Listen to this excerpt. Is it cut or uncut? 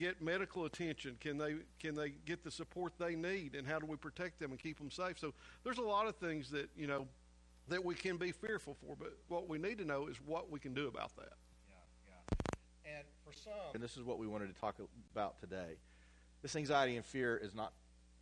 cut